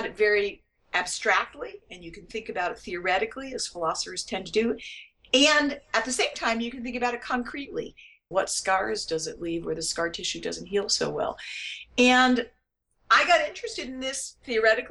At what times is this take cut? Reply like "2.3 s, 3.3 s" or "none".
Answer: 8.3 s